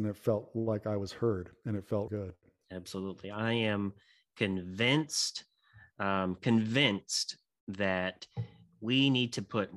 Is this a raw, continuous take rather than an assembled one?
no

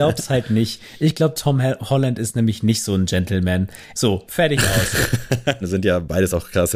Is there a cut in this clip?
yes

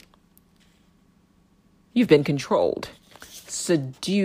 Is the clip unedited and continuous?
yes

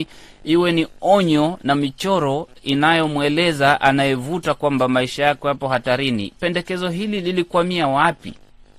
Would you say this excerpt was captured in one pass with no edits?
yes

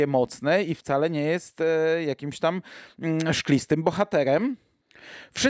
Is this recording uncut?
yes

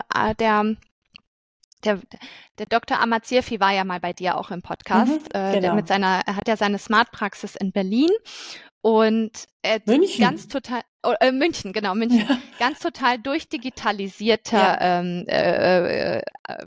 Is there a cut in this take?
no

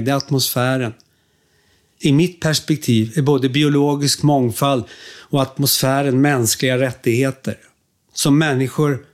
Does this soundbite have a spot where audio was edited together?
no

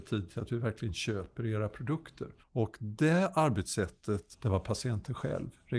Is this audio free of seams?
no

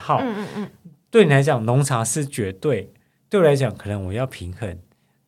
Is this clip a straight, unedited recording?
yes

